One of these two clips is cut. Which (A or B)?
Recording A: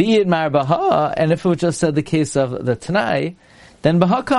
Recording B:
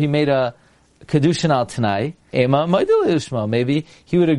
B